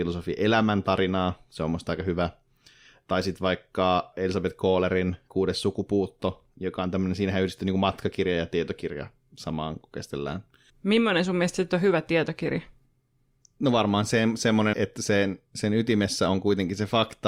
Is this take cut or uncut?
cut